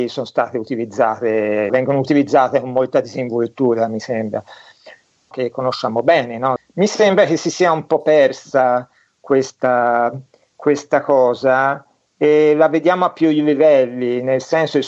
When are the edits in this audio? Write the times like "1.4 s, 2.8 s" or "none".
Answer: 1.7 s, 5.3 s, 6.6 s